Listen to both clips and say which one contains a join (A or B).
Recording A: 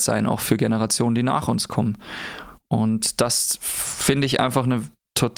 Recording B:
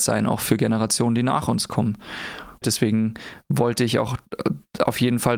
B